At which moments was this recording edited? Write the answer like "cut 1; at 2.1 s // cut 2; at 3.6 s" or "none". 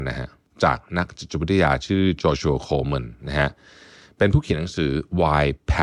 none